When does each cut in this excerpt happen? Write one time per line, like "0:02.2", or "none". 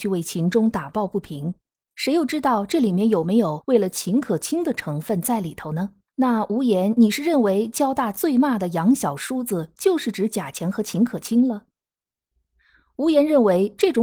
0:06.1